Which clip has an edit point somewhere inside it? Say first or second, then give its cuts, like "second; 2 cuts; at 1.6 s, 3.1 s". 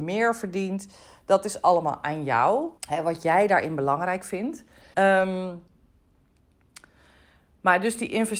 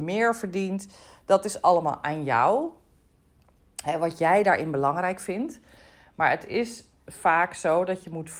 first; 2 cuts; at 2.8 s, 4.9 s